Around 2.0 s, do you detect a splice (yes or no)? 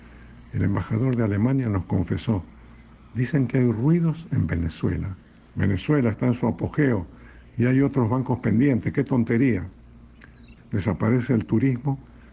no